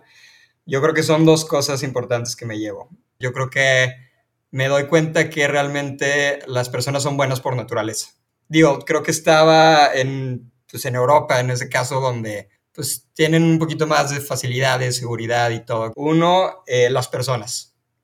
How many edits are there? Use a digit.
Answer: 2